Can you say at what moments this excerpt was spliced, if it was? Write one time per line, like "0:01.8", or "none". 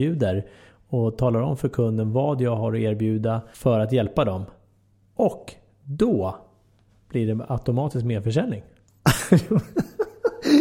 none